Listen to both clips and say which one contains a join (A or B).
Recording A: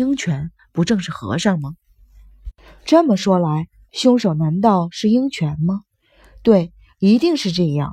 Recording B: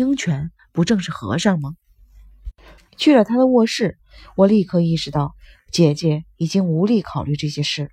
B